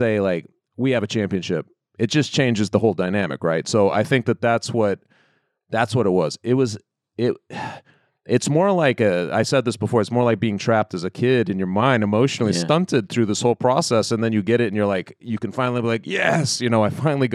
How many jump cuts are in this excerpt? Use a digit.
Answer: 0